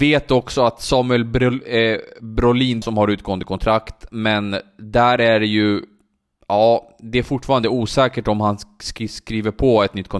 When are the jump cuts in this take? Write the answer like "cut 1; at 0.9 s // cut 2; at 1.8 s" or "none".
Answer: cut 1; at 2.8 s